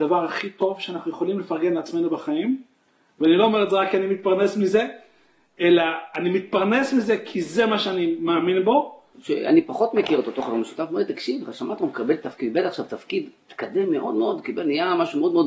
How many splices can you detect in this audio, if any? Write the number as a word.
one